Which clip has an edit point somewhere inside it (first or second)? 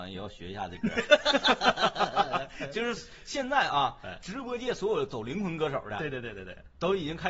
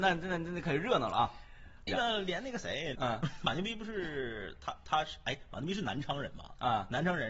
second